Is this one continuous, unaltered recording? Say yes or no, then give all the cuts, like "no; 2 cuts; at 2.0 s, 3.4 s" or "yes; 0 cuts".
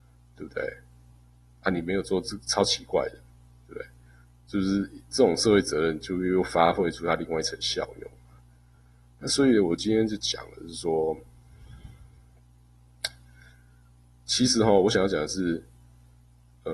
yes; 0 cuts